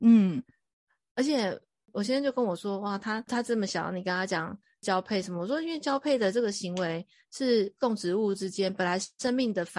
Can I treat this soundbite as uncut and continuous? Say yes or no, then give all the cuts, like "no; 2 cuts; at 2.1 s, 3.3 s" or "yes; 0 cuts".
yes; 0 cuts